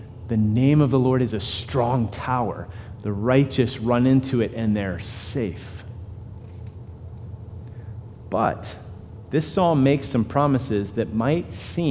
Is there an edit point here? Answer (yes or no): no